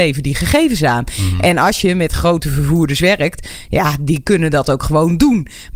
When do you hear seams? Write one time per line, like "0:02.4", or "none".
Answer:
none